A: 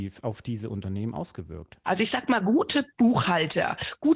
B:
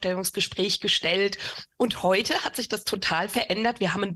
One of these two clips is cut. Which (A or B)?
A